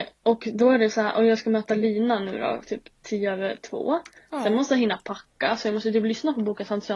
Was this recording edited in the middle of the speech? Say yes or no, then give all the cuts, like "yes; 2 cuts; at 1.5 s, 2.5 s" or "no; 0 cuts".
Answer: no; 0 cuts